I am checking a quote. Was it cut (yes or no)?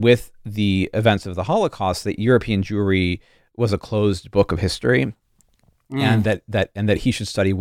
no